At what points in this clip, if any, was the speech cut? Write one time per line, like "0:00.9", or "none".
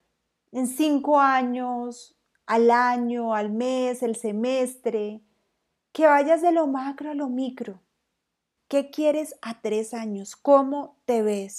0:08.6